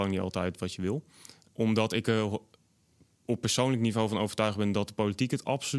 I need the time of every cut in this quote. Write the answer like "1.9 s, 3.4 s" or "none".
1.4 s